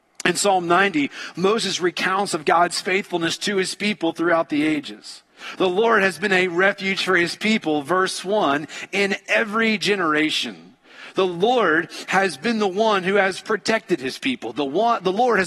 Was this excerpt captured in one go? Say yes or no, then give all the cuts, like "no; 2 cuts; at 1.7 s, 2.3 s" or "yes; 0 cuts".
yes; 0 cuts